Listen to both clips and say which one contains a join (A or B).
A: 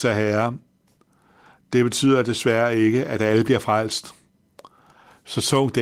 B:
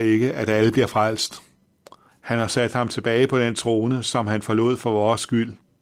B